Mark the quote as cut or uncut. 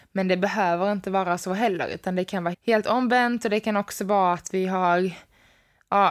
cut